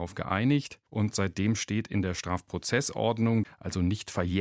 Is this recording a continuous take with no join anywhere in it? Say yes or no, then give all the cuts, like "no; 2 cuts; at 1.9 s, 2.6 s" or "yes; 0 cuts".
no; 1 cut; at 3.4 s